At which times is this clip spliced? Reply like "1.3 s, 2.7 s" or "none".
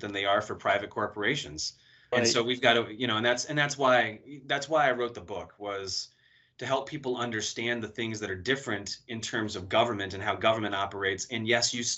2.1 s